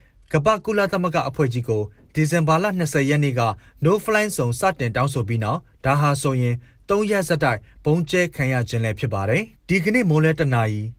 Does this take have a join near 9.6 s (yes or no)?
yes